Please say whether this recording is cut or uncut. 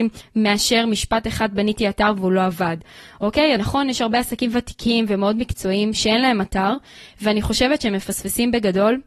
cut